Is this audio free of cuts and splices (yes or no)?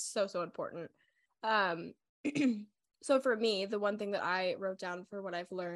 yes